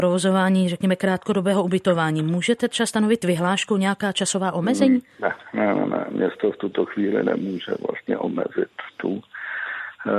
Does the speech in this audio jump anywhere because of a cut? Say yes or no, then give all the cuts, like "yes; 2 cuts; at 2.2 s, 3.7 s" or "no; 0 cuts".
no; 0 cuts